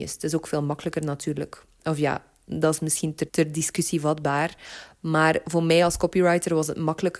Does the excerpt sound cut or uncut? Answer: cut